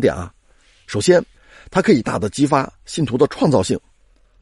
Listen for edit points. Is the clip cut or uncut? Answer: cut